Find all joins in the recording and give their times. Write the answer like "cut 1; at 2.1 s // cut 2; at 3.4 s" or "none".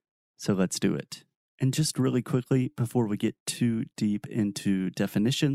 none